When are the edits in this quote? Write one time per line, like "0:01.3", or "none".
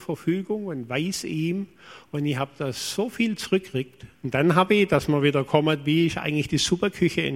0:04.1